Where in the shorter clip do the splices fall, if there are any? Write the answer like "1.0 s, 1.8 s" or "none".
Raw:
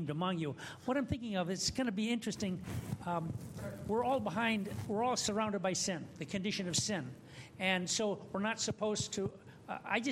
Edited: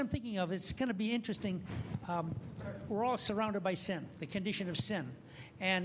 2.9 s

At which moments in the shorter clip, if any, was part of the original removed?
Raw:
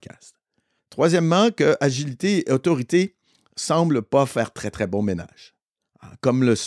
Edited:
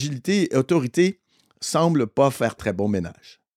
2.6 s

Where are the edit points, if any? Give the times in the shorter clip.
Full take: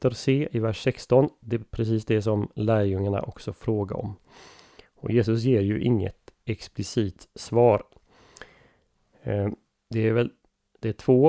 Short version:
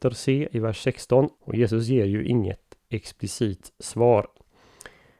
1.4 s

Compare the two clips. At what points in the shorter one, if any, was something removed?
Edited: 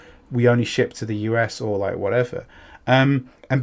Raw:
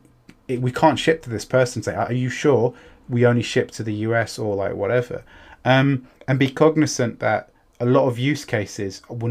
none

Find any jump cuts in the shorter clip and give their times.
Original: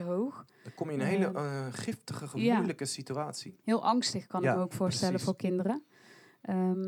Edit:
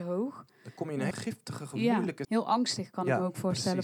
1.1 s, 2.2 s

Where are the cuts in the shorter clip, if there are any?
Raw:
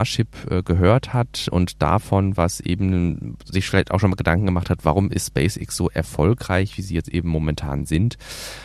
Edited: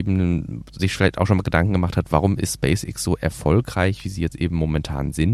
none

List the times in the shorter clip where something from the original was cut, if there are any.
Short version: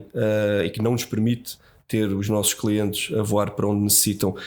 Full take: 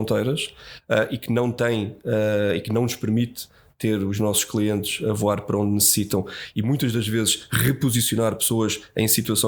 none

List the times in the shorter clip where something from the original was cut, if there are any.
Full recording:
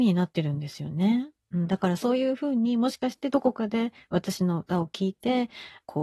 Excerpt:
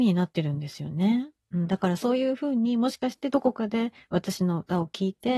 none

